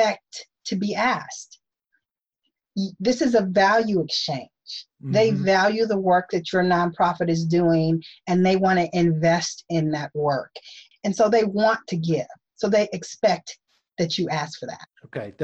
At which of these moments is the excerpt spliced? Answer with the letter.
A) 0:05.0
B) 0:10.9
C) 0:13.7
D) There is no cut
B